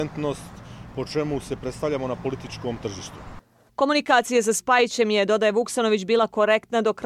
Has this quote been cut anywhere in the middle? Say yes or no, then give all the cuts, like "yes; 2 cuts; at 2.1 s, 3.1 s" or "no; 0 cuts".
no; 0 cuts